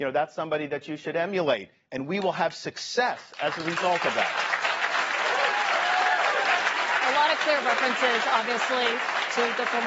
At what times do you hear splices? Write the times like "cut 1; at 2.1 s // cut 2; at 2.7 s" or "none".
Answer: none